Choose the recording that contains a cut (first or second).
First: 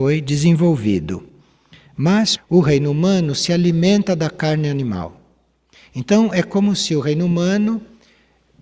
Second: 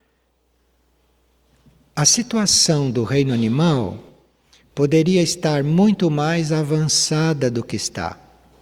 first